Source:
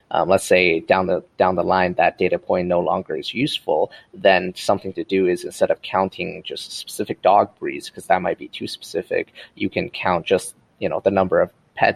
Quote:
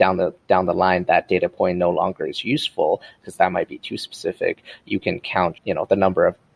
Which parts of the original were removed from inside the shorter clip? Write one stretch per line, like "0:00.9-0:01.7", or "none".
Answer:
0:04.1-0:07.9
0:10.2-0:10.7

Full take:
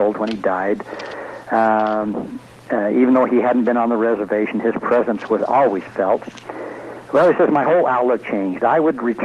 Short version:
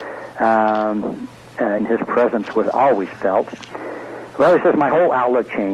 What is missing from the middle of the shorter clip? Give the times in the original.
0:02.9-0:04.5

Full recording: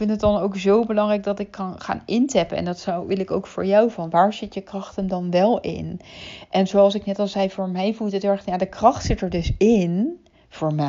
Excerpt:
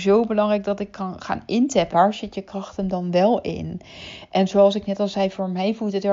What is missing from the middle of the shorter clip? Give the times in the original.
0:02.5-0:04.1

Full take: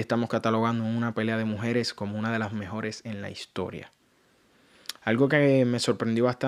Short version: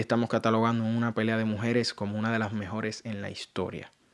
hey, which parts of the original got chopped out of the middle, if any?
none

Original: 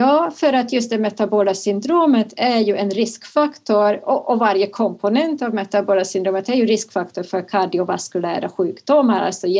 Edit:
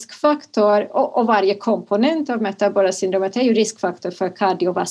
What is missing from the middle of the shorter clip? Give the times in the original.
none

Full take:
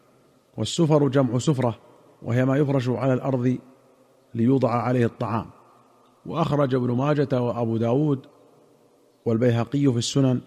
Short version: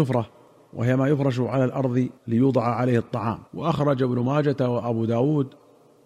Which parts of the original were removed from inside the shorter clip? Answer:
0:03.7-0:04.2
0:05.5-0:06.2

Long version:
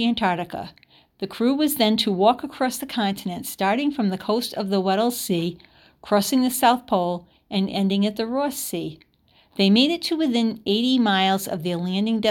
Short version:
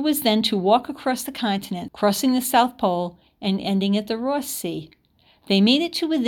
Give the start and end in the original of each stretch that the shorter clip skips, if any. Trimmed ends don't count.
0:03.4-0:06.0

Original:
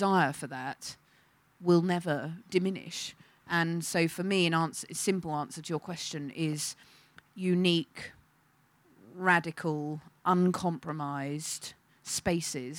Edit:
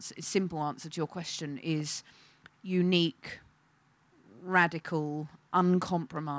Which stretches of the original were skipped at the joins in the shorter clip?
none

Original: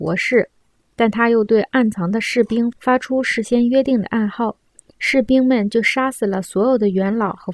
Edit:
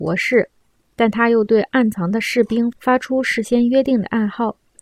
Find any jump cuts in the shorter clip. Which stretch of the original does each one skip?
none

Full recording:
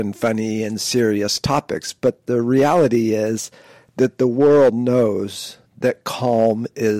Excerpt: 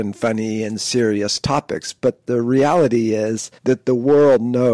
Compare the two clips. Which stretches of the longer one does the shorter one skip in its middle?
0:03.6-0:03.9

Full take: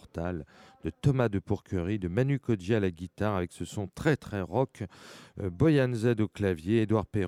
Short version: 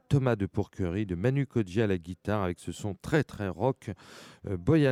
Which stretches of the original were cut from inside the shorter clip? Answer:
none

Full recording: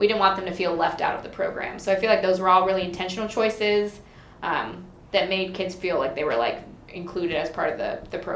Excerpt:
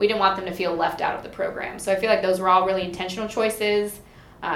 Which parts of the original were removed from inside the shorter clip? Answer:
none

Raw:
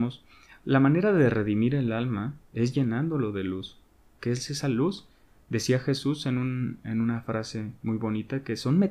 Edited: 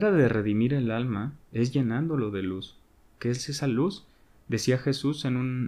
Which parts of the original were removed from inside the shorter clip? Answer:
none

